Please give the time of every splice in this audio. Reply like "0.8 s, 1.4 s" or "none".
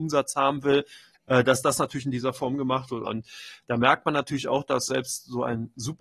1.1 s, 3.1 s